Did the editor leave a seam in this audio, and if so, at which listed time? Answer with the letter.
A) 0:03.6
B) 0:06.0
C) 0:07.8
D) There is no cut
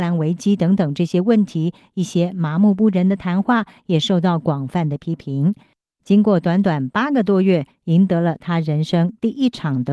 B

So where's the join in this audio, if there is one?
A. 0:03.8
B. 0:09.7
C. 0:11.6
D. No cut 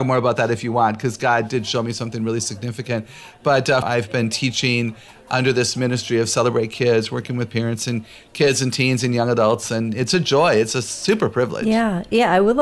A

